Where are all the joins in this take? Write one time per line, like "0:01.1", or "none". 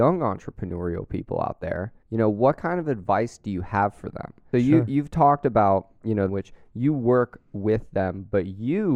0:02.0
0:04.5
0:06.3